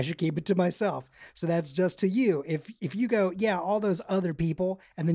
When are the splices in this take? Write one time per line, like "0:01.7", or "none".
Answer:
none